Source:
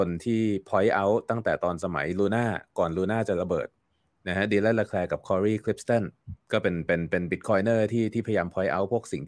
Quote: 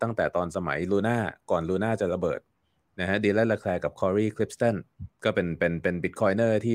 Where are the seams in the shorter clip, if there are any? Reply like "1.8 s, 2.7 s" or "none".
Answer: none

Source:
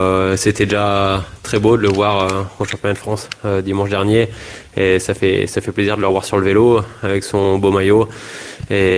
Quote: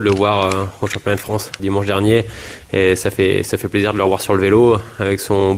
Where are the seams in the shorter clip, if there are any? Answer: 1.6 s

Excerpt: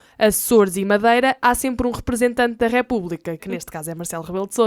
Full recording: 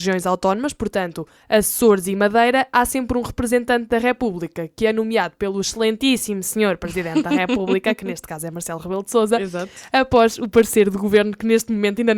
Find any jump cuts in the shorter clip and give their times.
3.4 s

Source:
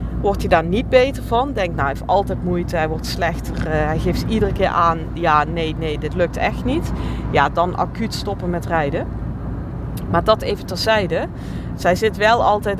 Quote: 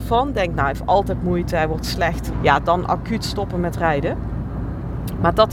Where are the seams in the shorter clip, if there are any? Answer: 2.3 s

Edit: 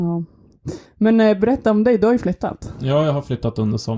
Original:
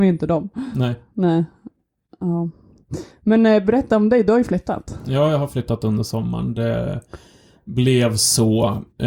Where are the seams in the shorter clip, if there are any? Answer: none

